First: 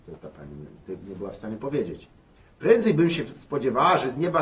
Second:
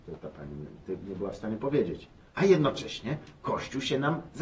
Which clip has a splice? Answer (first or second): second